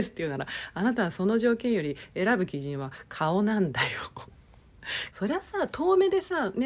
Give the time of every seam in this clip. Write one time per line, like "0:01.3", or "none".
0:05.1